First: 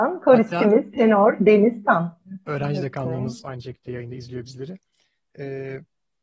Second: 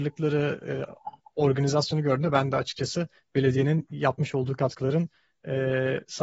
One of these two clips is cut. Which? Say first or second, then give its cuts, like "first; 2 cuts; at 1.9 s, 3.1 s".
first; 1 cut; at 2.5 s